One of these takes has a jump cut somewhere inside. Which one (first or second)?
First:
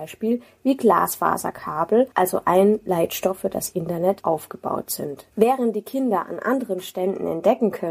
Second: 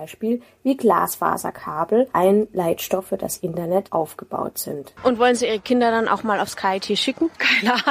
second